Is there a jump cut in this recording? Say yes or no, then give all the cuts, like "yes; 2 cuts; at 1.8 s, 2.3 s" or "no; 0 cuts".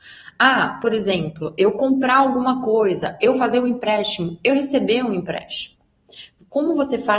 no; 0 cuts